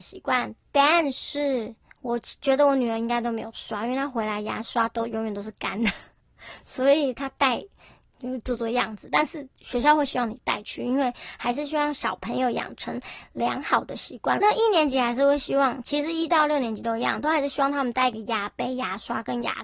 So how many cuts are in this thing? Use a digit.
1